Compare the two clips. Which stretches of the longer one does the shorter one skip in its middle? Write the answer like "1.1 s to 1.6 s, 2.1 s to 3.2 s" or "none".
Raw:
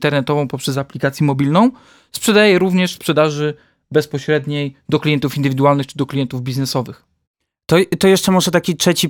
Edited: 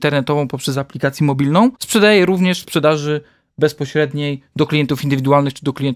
1.7 s to 2.1 s